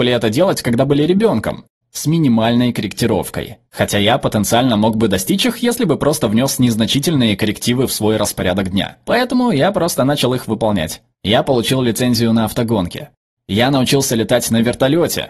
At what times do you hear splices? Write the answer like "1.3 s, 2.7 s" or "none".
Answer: 1.8 s, 3.7 s